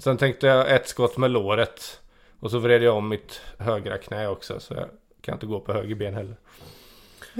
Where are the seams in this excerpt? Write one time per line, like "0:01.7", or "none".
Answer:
0:03.6